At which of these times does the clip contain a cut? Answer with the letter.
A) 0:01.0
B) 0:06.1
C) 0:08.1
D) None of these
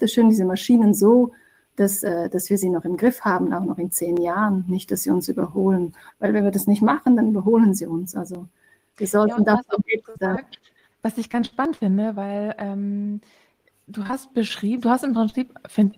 B